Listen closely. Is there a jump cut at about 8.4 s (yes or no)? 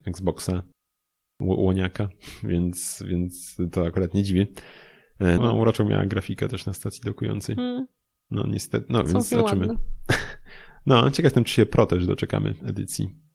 no